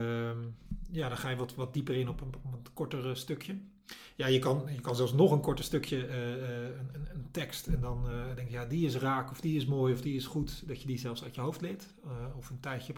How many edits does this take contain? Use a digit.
0